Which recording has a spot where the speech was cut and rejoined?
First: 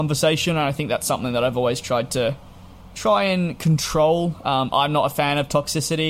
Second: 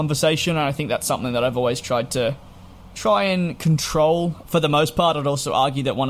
second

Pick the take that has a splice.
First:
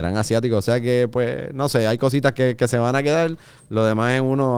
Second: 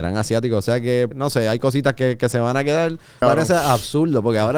second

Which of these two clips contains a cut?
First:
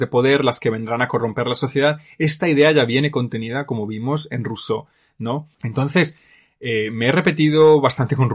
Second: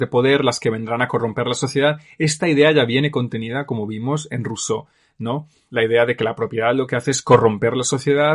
first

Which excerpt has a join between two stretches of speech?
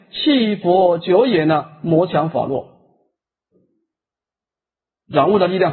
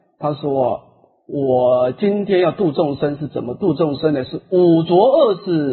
first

